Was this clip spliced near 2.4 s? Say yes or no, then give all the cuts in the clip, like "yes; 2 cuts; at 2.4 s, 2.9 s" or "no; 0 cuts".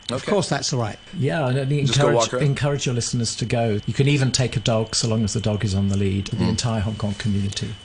no; 3 cuts; at 1.1 s, 3.8 s, 6.3 s